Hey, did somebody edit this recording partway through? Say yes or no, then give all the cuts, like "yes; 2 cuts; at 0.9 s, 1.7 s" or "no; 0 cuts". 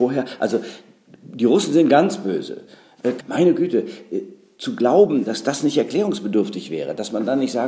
yes; 1 cut; at 3.2 s